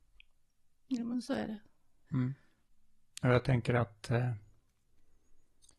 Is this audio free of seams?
no; 1 cut; at 2.0 s

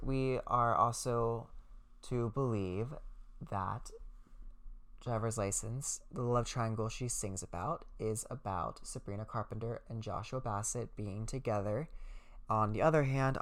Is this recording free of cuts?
no; 1 cut; at 12.5 s

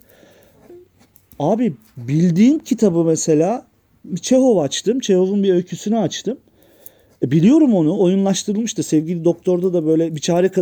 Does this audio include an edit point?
no; 0 cuts

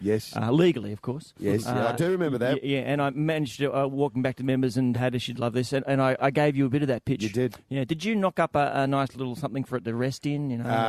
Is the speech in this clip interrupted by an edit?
yes; 2 cuts; at 4.9 s, 6.2 s

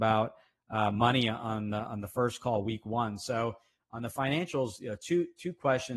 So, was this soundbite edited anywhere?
no; 0 cuts

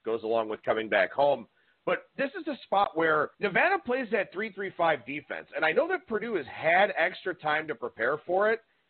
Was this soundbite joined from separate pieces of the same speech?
yes; 1 cut; at 3.3 s

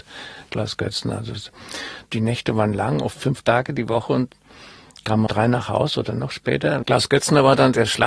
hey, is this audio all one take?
no; 2 cuts; at 5.3 s, 6.8 s

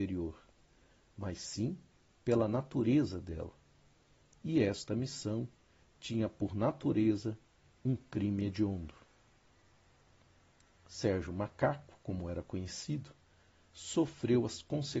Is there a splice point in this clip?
no; 0 cuts

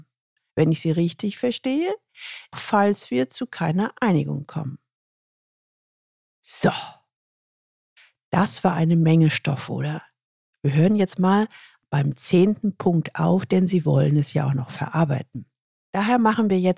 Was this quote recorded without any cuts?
no; 2 cuts; at 2.5 s, 6.2 s

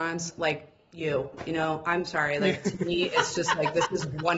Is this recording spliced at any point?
no; 0 cuts

